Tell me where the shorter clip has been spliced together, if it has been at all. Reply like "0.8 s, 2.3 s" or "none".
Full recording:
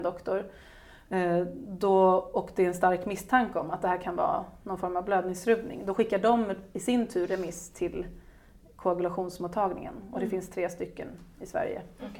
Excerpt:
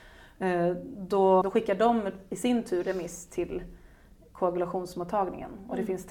1.4 s